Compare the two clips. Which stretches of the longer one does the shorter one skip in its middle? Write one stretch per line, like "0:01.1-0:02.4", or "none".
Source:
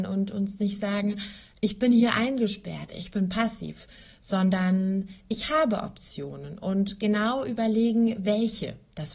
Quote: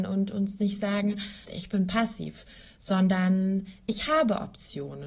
0:01.4-0:02.9